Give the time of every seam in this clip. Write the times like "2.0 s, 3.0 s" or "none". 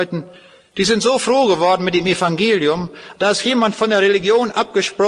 3.2 s